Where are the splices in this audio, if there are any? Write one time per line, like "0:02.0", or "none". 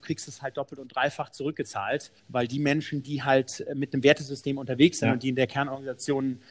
0:02.2